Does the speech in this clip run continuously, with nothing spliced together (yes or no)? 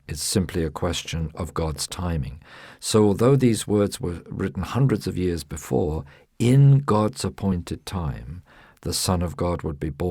yes